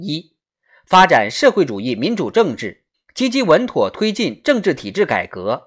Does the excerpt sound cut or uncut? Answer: cut